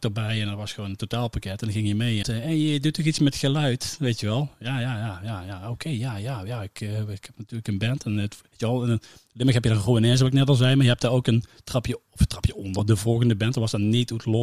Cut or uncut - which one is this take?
cut